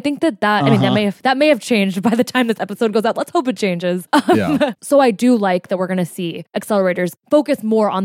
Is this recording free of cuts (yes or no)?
no